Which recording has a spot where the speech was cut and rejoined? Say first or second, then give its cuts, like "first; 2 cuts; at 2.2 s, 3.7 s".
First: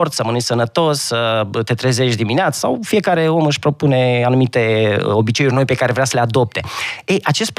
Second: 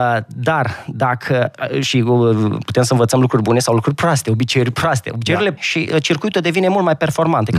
second; 1 cut; at 5.6 s